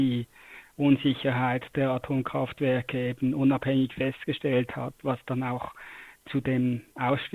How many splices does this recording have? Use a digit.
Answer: 0